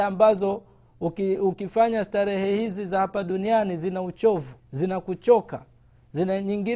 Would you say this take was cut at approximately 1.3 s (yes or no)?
yes